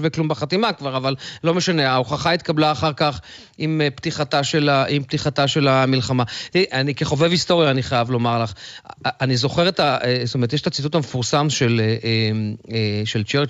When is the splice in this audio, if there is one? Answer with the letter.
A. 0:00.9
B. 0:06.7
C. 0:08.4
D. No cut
B